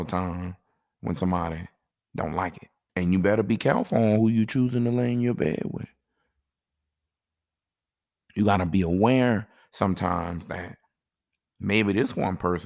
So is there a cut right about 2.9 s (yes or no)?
yes